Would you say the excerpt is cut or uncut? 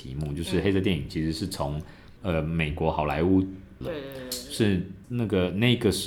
cut